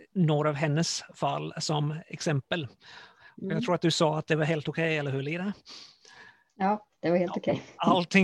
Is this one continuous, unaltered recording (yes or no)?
yes